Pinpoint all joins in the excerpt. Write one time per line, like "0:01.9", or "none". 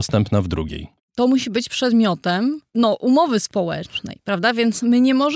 0:01.0
0:02.7